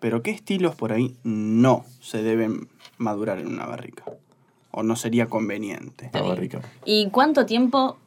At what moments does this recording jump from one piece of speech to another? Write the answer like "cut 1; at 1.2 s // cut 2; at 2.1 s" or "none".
cut 1; at 6.1 s